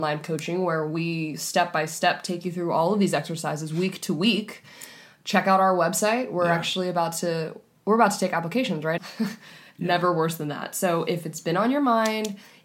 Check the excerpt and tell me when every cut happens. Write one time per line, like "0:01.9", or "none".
0:09.0